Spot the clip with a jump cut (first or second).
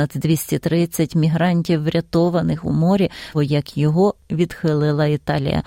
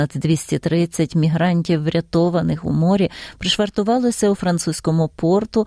first